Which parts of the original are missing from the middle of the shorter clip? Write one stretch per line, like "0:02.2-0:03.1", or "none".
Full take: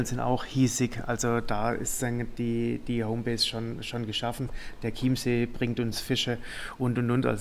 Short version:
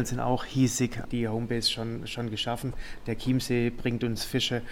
0:01.0-0:02.8